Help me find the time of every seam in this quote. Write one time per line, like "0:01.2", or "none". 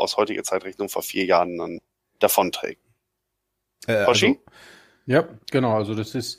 none